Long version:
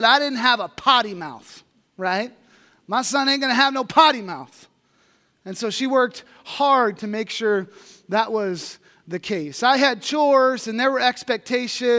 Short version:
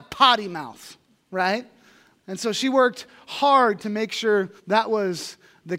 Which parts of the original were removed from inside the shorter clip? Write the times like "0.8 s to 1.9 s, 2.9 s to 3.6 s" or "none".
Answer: 2.8 s to 5.3 s, 7.7 s to 8.0 s